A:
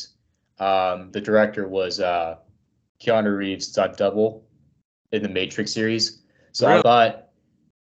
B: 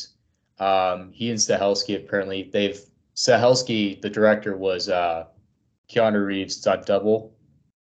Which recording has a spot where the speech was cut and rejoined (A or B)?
A